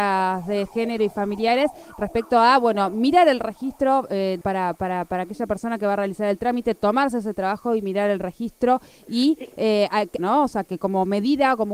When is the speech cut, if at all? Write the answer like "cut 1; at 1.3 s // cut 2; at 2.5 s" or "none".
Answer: cut 1; at 4.4 s // cut 2; at 10.2 s